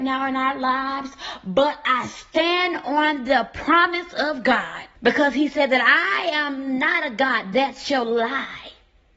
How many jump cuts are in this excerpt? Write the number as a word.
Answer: one